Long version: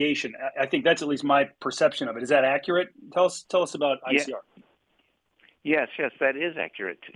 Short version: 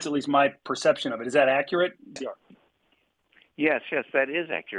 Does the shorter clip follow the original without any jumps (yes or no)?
no